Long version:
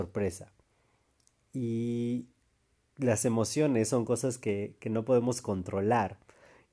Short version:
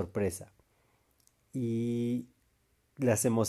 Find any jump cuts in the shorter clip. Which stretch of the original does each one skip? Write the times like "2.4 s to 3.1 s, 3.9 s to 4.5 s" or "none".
none